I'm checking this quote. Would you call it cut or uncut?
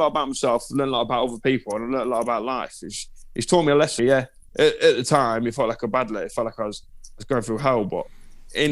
cut